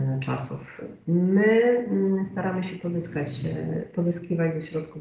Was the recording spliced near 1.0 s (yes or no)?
yes